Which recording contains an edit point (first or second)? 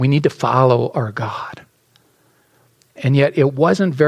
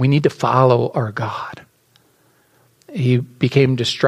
second